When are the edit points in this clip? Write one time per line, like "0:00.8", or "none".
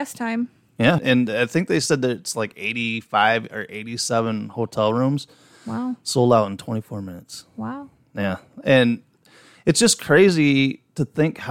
0:01.0